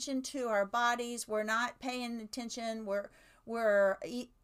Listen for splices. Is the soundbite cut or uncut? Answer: uncut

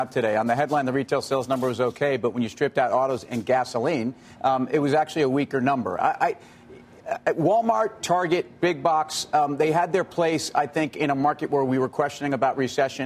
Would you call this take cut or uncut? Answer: uncut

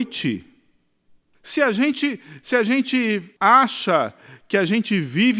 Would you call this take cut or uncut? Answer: cut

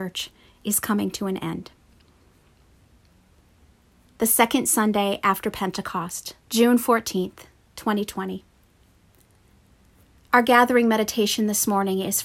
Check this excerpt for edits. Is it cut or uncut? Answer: cut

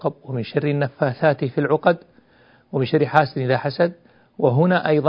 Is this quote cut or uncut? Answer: uncut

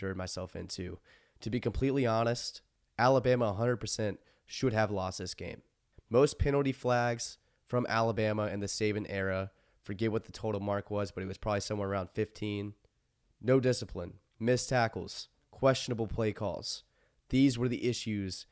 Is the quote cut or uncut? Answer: uncut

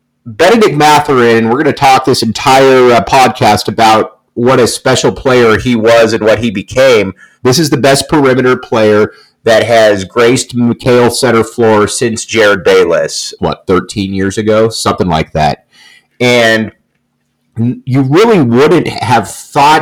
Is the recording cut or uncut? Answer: cut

